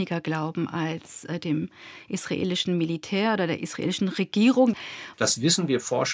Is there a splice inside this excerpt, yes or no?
yes